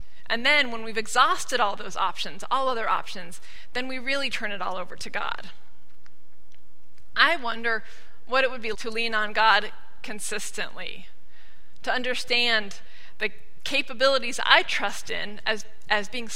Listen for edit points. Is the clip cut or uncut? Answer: cut